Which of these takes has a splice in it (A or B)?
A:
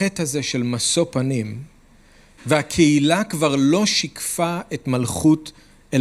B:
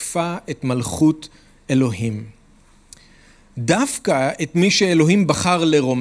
A